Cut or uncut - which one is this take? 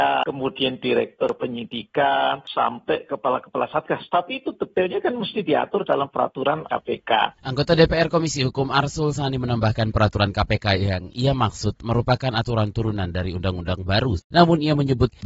cut